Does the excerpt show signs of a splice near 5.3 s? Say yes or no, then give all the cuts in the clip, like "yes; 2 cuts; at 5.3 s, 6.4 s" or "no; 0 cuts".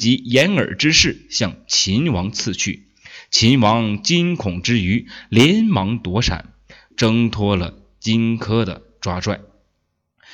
no; 1 cut; at 6.9 s